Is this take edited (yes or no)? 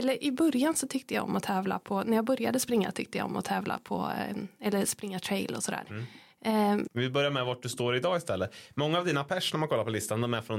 yes